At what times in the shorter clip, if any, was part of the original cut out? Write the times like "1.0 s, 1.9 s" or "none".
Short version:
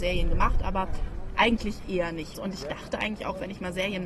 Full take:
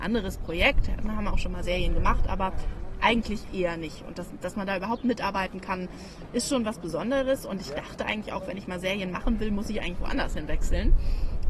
2.3 s